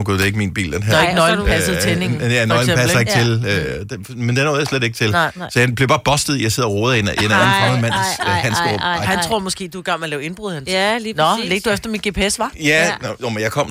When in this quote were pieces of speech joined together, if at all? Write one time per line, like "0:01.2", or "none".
none